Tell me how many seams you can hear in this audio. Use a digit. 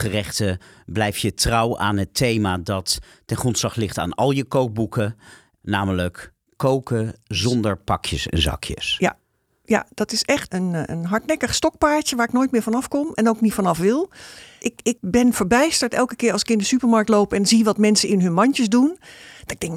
1